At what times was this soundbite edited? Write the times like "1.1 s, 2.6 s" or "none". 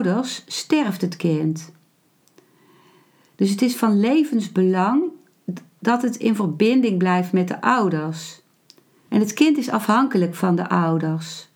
9.1 s